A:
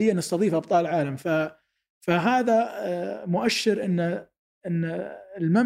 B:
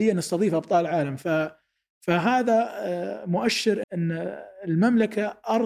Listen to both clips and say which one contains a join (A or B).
B